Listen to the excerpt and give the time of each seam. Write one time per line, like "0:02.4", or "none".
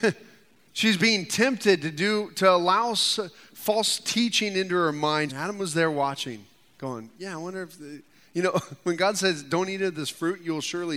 0:05.3

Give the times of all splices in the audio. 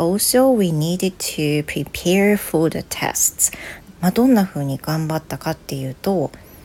0:03.9

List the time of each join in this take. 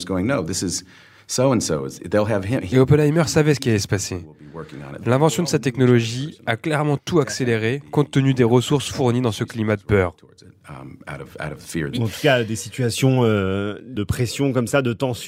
0:11.9

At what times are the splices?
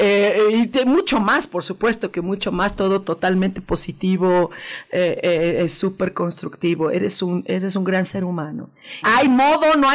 0:09.0

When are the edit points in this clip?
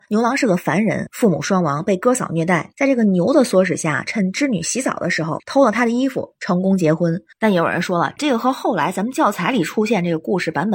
0:02.7
0:07.3

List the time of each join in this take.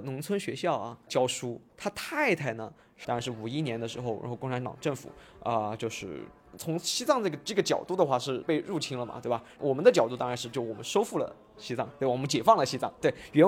0:03.0

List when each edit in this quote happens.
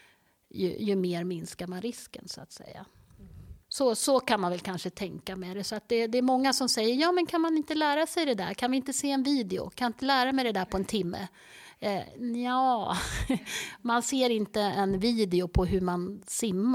0:03.6

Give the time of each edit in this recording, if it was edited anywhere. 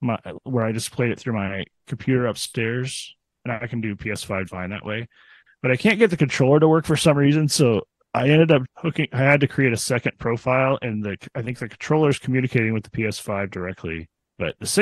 0:04.5
0:08.7

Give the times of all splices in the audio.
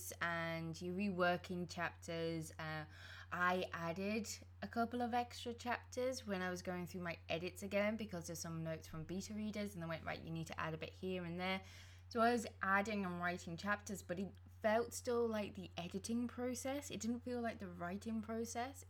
none

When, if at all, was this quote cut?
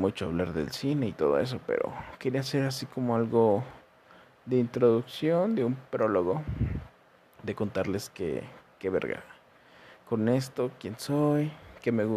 none

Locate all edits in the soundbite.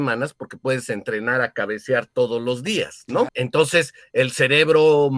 0:03.3

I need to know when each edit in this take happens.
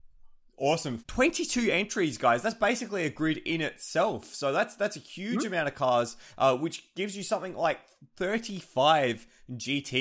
0:01.0

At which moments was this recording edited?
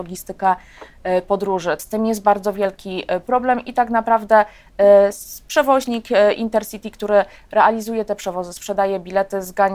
0:01.8

